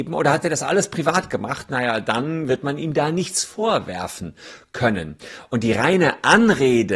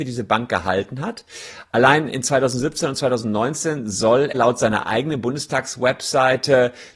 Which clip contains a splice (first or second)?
second